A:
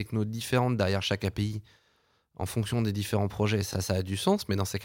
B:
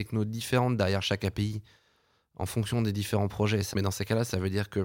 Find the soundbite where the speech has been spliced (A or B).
B